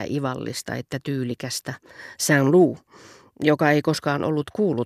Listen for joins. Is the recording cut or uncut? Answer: uncut